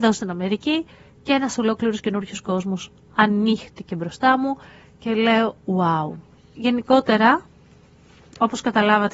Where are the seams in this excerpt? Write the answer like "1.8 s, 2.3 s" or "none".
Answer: none